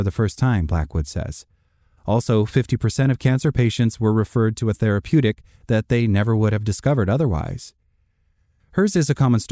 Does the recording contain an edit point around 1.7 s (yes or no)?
no